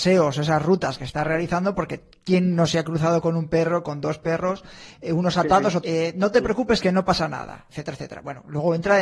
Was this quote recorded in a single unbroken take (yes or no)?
no